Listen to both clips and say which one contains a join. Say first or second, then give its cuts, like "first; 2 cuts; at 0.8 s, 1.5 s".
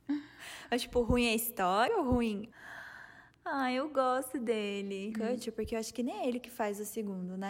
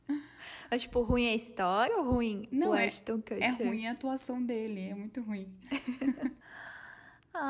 first; 2 cuts; at 2.5 s, 5.1 s